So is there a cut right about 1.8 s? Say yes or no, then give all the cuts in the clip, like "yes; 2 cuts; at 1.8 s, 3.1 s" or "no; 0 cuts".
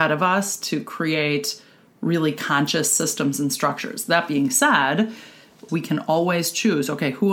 no; 1 cut; at 5.7 s